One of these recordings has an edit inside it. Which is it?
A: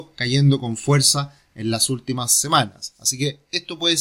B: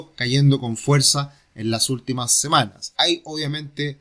B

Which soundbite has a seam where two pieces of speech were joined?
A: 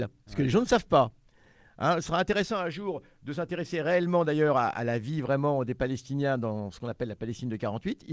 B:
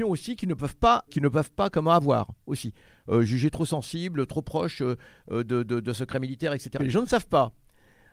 B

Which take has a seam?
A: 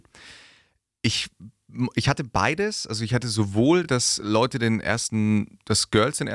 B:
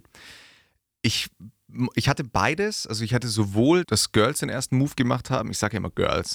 B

